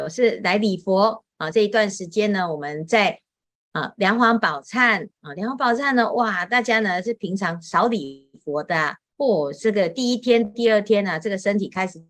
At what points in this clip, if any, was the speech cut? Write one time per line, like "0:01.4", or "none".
none